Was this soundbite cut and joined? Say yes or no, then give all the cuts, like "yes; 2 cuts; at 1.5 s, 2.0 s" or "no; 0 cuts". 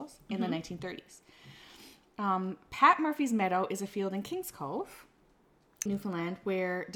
yes; 1 cut; at 5.9 s